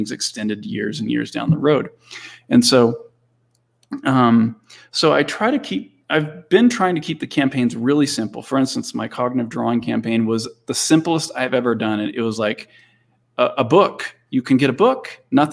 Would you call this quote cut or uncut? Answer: uncut